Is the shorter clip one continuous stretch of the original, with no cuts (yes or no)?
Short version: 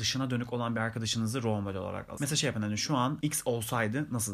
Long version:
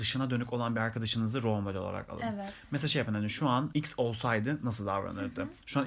no